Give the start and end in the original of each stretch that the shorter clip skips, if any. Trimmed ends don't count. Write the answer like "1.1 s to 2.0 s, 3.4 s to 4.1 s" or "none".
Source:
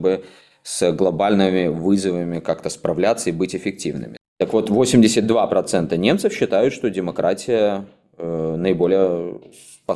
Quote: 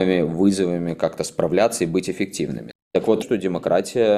4.7 s to 6.7 s